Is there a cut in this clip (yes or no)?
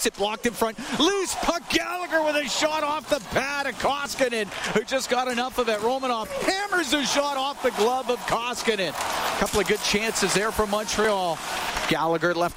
no